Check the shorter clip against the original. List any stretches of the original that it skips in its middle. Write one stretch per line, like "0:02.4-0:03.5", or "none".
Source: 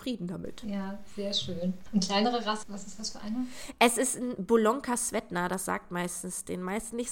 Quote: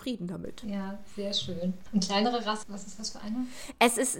none